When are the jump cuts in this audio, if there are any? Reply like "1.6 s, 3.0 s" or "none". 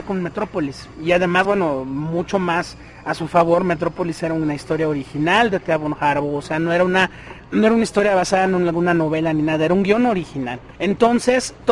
none